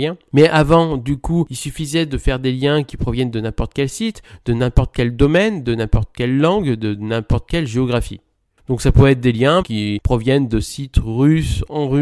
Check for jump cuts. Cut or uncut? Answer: cut